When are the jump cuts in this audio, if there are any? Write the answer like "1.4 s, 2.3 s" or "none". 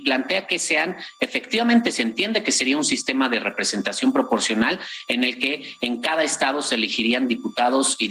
none